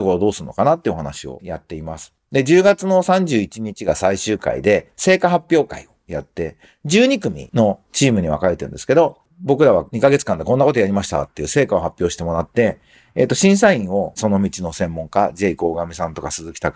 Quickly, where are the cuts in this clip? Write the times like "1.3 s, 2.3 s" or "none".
none